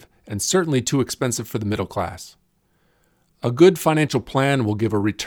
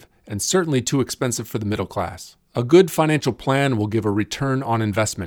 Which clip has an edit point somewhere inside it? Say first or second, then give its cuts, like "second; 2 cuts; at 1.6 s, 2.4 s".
second; 1 cut; at 2.4 s